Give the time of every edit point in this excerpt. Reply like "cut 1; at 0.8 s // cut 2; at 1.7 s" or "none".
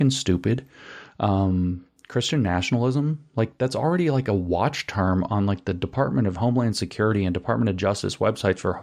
none